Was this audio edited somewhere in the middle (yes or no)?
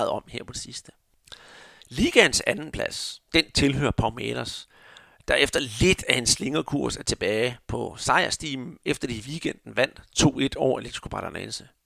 no